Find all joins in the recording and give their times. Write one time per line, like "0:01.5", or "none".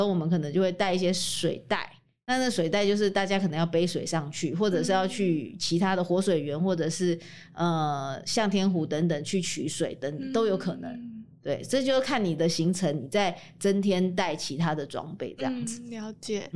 none